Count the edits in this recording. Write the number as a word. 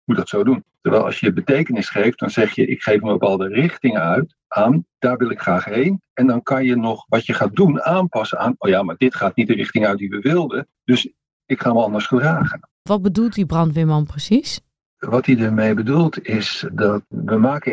one